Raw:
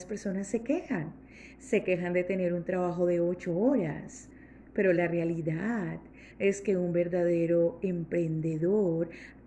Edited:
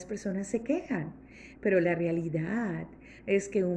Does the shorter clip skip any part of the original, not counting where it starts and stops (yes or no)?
yes